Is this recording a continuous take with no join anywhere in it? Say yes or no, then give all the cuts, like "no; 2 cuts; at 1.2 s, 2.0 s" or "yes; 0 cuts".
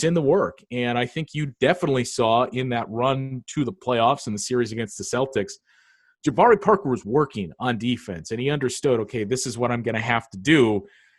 yes; 0 cuts